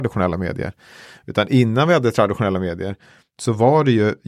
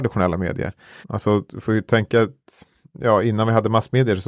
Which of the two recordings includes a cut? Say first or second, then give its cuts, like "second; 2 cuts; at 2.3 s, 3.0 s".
second; 1 cut; at 1.0 s